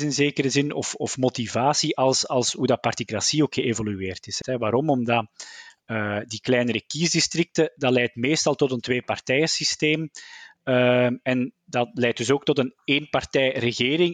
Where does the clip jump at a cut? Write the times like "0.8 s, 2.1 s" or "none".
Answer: 4.4 s